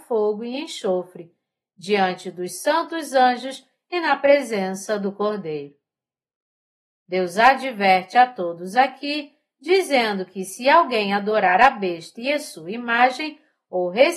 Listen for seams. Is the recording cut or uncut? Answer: uncut